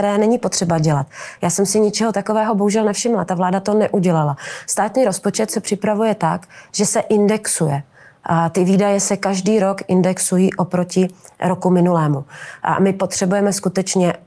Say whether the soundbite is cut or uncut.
uncut